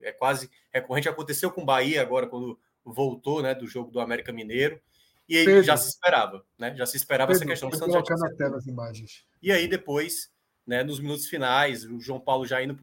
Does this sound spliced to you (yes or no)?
yes